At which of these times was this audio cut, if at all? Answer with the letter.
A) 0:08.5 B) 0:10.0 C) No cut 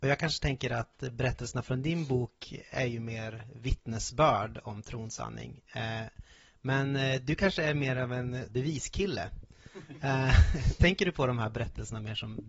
A